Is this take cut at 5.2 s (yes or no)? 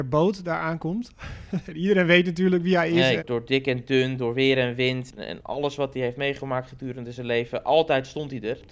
yes